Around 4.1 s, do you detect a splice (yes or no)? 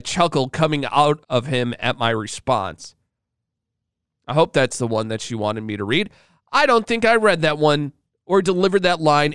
no